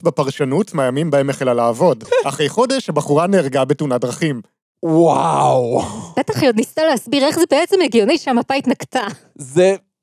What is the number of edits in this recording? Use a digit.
1